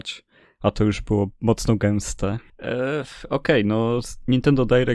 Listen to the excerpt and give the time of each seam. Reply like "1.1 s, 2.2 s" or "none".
2.5 s